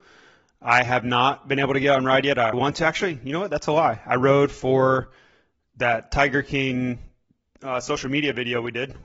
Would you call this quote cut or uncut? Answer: cut